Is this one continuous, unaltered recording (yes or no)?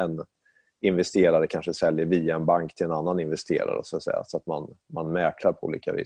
yes